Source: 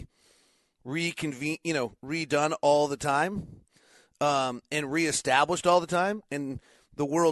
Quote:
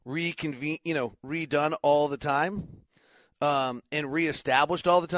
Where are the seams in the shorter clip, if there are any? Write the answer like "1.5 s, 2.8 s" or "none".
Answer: none